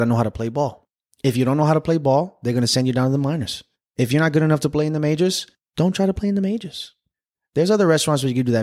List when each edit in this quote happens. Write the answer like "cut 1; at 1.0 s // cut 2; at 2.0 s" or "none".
none